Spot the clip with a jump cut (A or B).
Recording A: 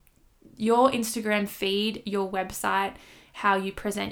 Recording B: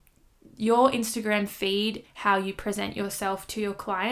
B